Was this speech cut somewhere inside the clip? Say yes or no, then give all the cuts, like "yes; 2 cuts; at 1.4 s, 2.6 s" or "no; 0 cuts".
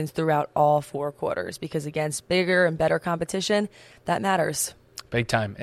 no; 0 cuts